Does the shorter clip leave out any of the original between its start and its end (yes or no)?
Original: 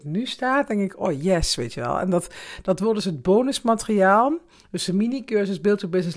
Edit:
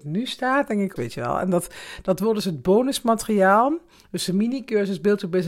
yes